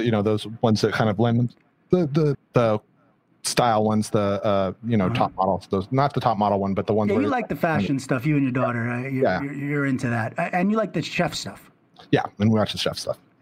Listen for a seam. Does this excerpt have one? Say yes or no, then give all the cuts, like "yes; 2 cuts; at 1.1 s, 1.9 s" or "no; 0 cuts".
yes; 1 cut; at 2.3 s